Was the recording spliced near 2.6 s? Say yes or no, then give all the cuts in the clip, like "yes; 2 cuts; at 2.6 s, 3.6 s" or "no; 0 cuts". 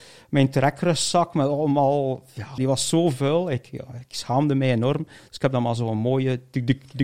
yes; 1 cut; at 2.6 s